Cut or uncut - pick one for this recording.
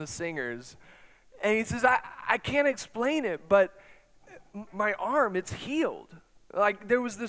cut